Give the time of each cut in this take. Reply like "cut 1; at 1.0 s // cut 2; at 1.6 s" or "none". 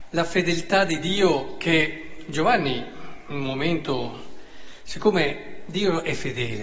none